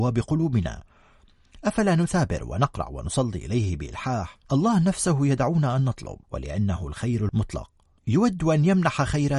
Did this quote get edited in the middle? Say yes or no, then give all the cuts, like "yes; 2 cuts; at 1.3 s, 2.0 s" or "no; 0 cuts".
yes; 2 cuts; at 4.4 s, 6.2 s